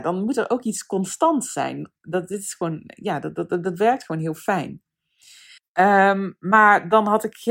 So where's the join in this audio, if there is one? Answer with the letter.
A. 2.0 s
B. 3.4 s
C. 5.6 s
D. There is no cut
C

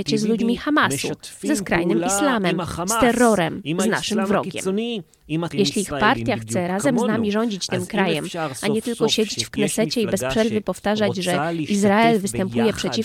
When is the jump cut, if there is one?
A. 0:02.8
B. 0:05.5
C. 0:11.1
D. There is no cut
B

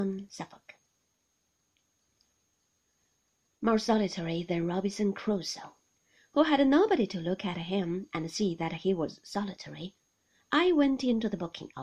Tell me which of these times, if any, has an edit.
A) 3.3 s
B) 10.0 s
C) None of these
C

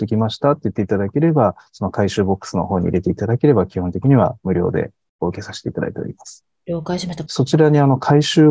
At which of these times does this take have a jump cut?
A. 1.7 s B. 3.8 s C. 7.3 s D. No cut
C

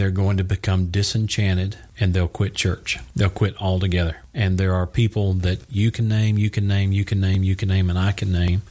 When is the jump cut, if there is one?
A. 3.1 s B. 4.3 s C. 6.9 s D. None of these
D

